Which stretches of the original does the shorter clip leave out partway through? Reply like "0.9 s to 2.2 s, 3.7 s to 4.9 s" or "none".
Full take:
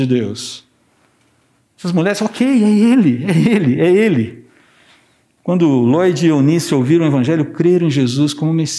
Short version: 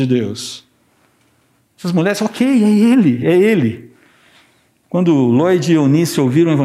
3.2 s to 3.8 s